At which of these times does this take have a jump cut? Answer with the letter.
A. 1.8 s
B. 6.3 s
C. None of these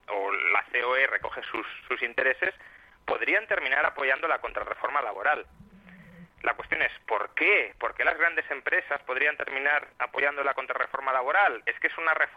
C